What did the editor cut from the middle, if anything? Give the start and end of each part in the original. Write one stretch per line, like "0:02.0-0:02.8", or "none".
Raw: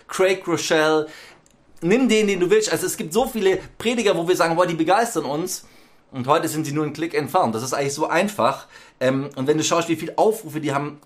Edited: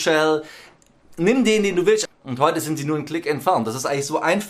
0:02.7-0:05.9